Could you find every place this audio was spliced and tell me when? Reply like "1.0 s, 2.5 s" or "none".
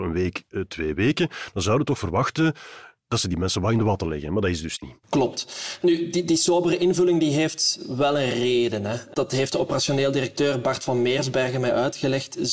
5.0 s